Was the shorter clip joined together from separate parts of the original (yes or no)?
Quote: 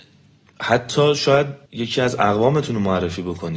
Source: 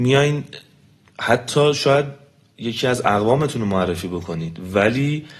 yes